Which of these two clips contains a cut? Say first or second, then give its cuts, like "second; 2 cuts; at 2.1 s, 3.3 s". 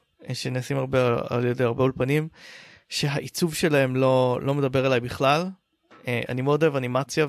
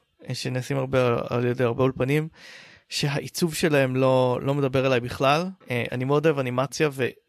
second; 1 cut; at 5.6 s